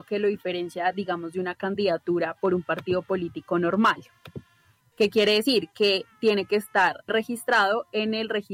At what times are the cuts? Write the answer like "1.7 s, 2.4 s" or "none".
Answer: 4.9 s, 7.1 s

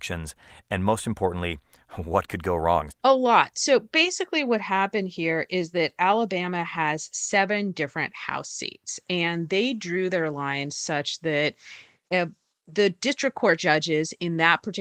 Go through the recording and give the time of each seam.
2.9 s

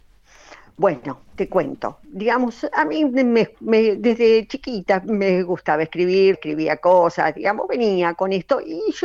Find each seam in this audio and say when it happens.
6.3 s

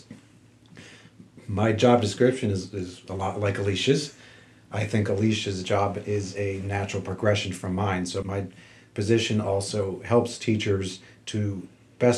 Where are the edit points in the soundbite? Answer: 8.2 s

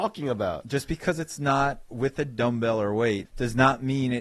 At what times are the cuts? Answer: 3.2 s

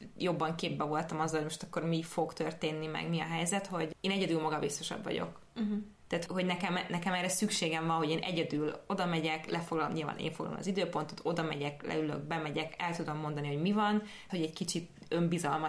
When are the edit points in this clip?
6.3 s, 14.3 s

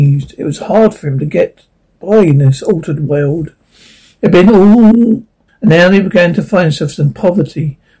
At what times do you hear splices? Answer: 5.5 s

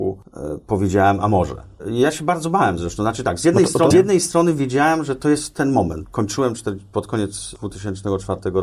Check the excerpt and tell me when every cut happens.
3.9 s, 6.0 s

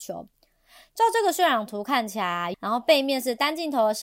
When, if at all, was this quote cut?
2.5 s

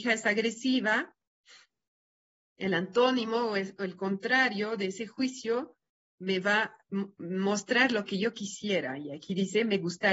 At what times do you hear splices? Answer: none

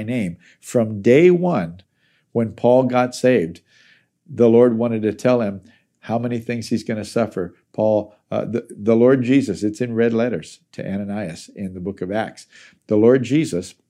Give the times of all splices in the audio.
none

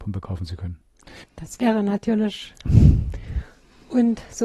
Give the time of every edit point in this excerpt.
1.2 s, 2.7 s

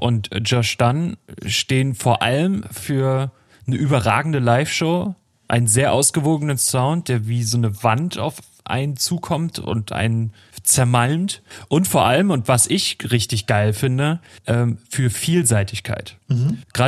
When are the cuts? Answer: none

